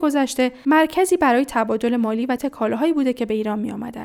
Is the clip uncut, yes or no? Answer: no